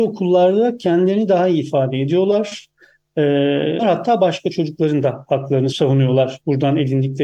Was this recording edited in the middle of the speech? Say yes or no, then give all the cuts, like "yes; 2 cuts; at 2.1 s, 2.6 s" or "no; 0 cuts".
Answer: yes; 2 cuts; at 3.8 s, 5.7 s